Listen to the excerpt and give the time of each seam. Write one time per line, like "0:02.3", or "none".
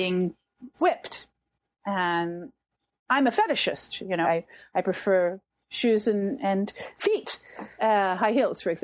0:04.2
0:06.4
0:07.8

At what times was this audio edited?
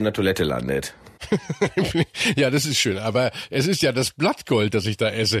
none

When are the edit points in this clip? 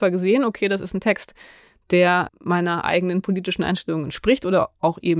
0:02.3

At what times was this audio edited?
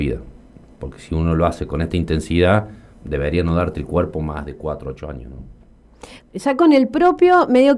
0:06.2

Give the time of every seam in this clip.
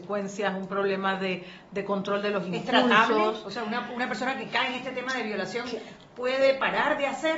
none

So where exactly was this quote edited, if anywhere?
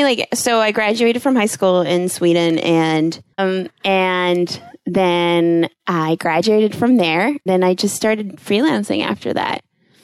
0:03.4
0:07.5

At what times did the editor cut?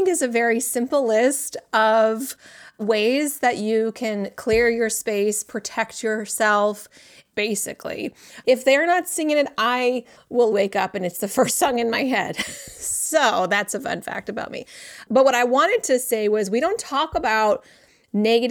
0:07.3
0:08.4
0:10.5

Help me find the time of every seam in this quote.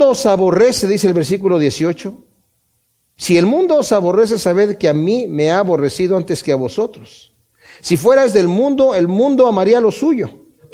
none

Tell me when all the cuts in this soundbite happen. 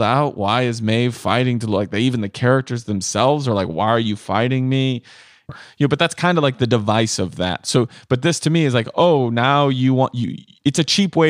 0:05.5

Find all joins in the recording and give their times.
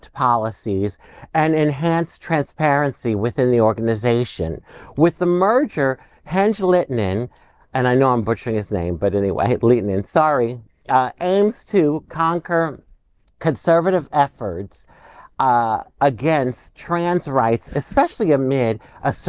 none

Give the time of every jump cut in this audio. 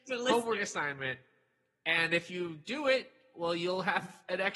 none

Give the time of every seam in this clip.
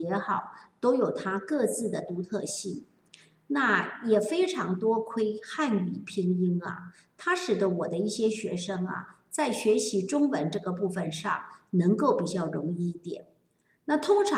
none

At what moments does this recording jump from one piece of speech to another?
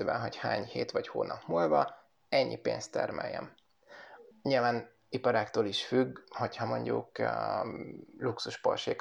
0:04.3

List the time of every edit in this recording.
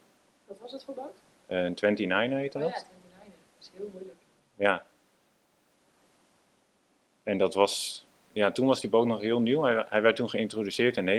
none

